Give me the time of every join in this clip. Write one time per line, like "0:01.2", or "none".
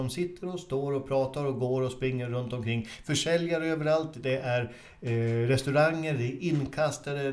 none